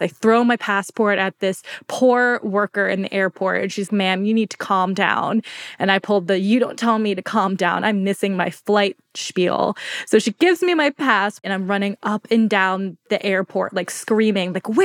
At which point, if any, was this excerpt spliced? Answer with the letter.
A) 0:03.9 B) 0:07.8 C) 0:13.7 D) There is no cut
A